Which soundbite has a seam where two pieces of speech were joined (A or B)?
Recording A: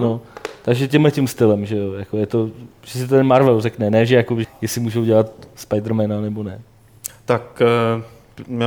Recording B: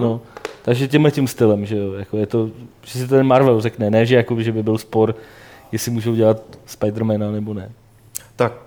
A